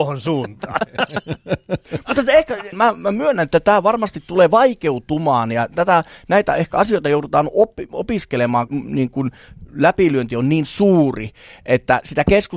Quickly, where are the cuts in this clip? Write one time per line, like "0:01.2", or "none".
0:02.7
0:08.7